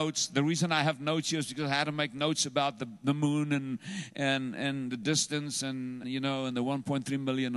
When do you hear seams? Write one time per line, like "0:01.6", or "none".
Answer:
0:06.0